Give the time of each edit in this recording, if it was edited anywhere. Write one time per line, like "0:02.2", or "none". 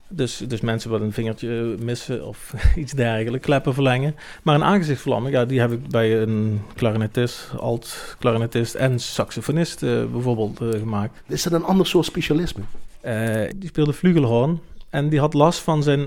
0:03.4
0:13.5